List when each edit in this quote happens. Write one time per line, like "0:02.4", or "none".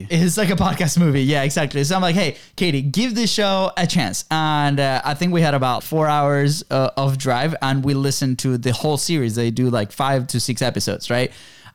0:05.8